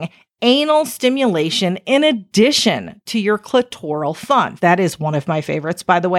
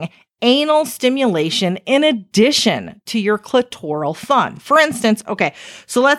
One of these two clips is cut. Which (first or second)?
first